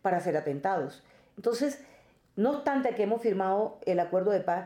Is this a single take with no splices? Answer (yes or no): yes